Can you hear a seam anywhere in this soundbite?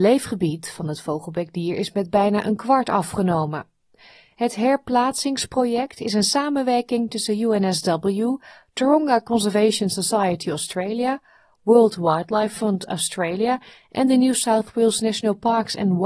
no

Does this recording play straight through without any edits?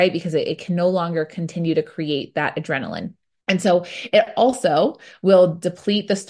no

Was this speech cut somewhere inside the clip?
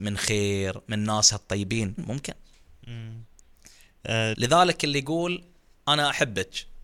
yes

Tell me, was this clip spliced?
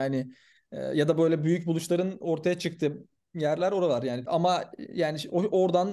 yes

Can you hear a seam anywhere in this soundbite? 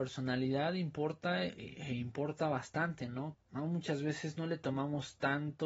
yes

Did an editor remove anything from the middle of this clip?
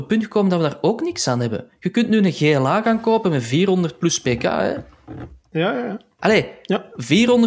no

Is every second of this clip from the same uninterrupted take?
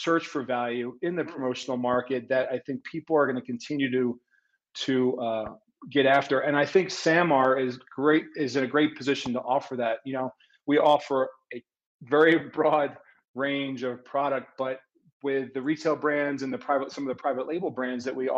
yes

